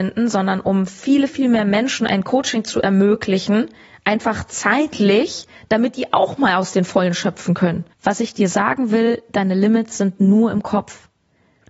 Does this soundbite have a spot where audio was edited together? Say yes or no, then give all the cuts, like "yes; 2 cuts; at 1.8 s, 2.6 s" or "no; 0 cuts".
yes; 2 cuts; at 1.3 s, 7.9 s